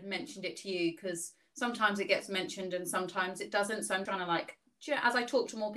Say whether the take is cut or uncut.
cut